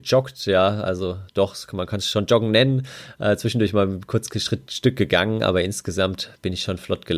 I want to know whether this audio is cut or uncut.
uncut